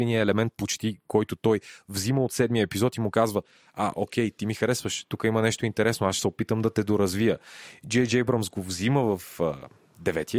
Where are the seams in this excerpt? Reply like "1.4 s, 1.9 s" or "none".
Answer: none

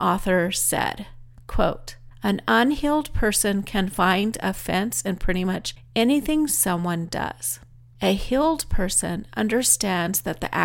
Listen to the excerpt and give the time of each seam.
none

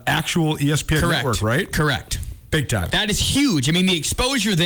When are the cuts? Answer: none

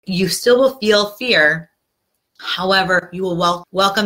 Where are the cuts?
none

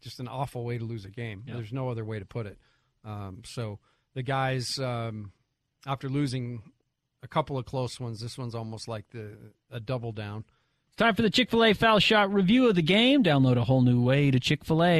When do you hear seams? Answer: 10.9 s

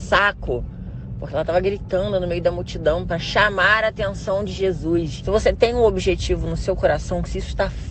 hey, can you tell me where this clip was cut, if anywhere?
5.2 s

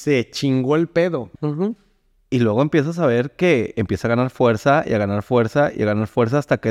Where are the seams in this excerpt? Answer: 1.3 s

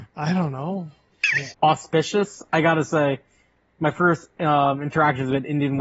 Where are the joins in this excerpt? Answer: 1.5 s

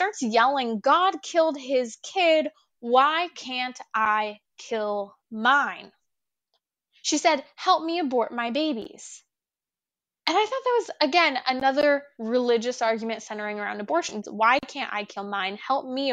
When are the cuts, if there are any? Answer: 14.2 s

